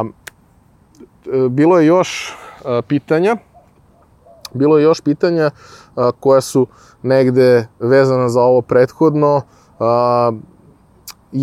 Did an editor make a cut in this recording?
no; 0 cuts

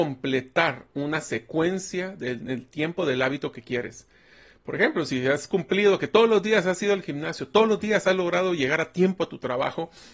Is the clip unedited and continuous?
yes; 0 cuts

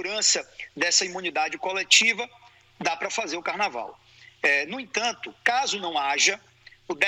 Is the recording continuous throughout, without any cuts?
yes; 0 cuts

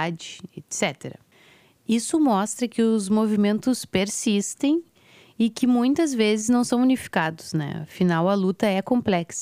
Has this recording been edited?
no; 0 cuts

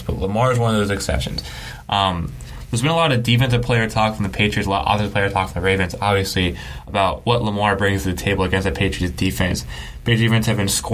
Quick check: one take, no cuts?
yes; 0 cuts

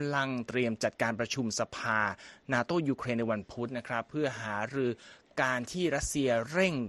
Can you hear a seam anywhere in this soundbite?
no; 0 cuts

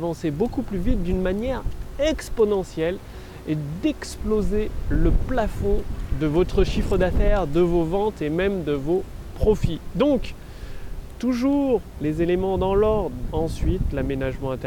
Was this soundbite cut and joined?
yes; 1 cut; at 13.3 s

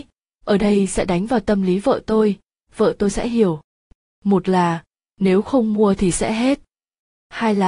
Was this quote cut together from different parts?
no; 0 cuts

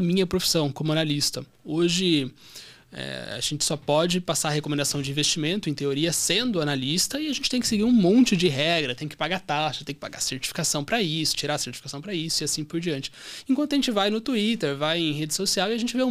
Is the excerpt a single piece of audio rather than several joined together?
yes; 0 cuts

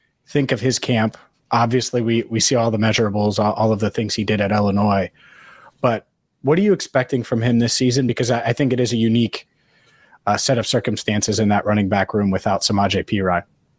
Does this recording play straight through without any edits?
yes; 0 cuts

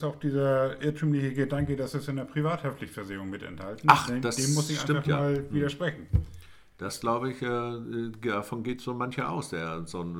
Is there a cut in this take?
no; 0 cuts

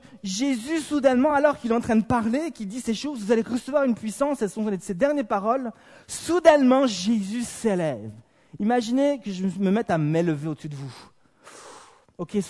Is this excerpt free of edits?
yes; 0 cuts

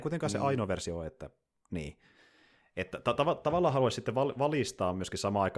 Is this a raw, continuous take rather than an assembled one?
yes; 0 cuts

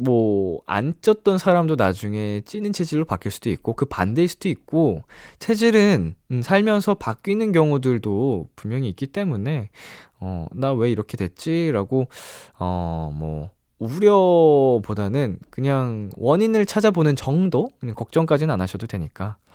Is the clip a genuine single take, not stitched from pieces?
yes; 0 cuts

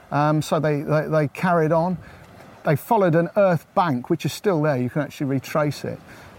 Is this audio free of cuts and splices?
no; 1 cut; at 2.5 s

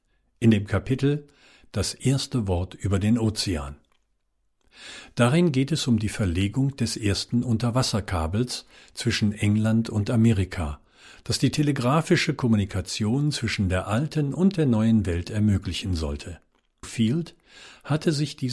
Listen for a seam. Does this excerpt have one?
yes; 1 cut; at 16.8 s

